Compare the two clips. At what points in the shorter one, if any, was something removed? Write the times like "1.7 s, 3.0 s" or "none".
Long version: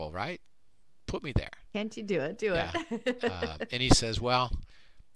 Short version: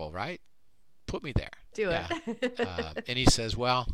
1.7 s